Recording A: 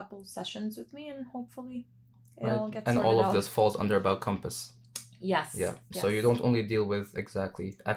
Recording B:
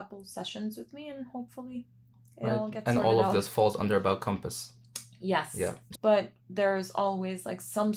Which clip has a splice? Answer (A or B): B